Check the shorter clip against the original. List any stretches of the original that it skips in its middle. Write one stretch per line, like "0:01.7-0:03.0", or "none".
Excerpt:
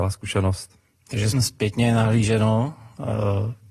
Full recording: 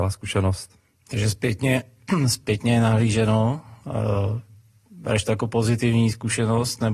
0:01.3-0:02.2